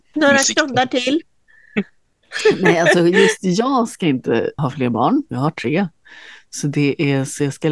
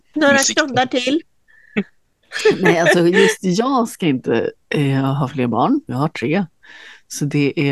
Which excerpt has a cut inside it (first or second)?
first